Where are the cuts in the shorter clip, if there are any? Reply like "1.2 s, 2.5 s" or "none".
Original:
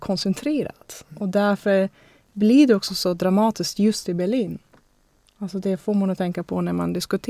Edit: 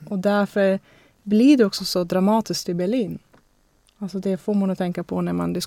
2.6 s